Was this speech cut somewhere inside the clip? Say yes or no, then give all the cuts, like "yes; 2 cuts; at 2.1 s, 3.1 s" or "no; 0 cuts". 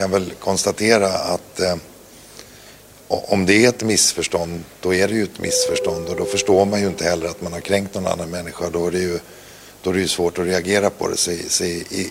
no; 0 cuts